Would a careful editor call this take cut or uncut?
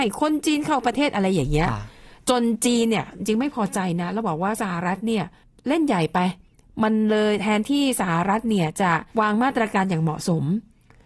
cut